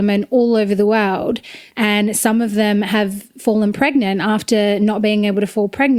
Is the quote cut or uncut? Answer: cut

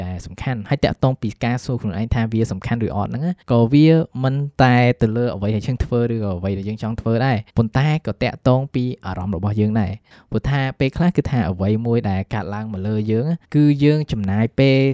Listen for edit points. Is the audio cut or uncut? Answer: cut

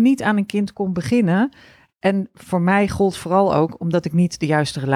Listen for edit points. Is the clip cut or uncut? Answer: uncut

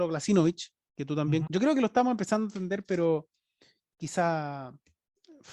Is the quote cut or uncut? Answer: cut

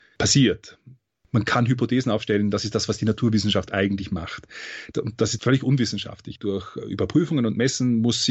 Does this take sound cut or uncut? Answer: cut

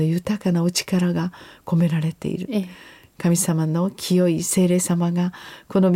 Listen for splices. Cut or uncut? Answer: uncut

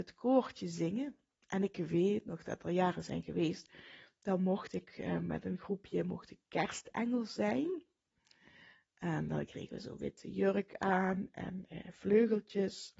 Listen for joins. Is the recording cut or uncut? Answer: uncut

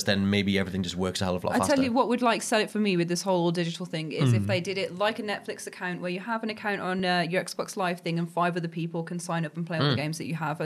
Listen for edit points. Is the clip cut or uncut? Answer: uncut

